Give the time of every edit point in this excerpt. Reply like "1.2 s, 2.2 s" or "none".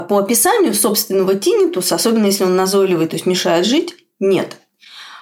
none